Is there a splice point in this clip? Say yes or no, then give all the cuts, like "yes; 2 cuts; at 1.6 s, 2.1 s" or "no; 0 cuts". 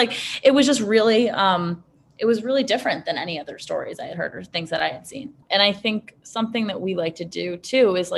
yes; 1 cut; at 5.4 s